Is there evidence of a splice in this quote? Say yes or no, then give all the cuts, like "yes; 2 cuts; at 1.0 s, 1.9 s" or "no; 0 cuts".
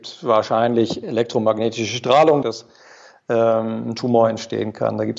yes; 1 cut; at 2.4 s